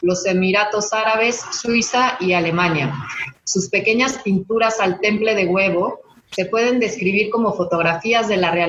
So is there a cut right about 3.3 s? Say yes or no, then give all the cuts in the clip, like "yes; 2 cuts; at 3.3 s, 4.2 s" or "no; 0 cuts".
yes; 1 cut; at 3.3 s